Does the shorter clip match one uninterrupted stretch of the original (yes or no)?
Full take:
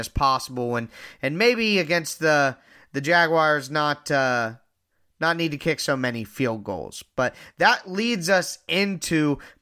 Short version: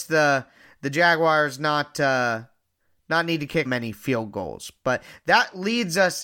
no